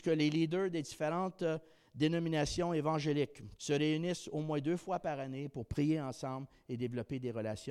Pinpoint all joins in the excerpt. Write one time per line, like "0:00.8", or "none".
0:03.6